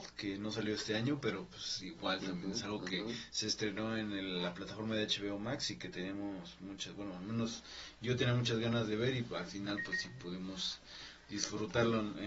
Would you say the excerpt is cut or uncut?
uncut